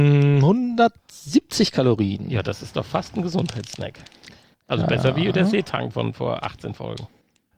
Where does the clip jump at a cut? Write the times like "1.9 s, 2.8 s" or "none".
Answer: none